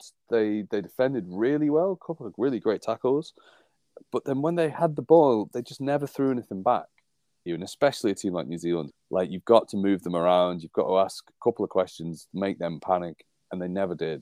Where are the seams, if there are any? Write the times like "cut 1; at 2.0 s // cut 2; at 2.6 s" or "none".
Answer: cut 1; at 7.5 s // cut 2; at 8.9 s